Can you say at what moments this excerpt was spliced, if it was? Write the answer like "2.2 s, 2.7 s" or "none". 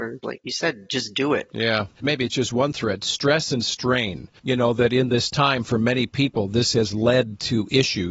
2.0 s, 4.4 s